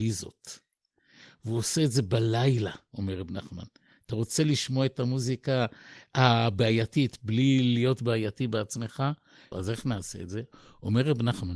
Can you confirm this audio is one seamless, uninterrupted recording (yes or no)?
no